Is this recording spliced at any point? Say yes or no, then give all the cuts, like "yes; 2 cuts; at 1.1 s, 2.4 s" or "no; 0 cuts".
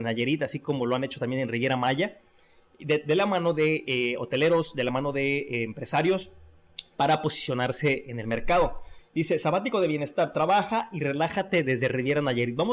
no; 0 cuts